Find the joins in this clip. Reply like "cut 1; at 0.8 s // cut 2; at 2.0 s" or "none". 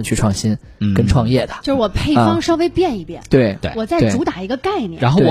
none